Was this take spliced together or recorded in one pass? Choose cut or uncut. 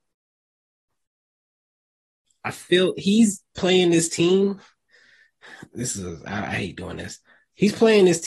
uncut